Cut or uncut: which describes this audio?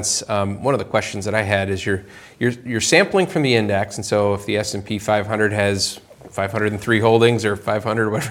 uncut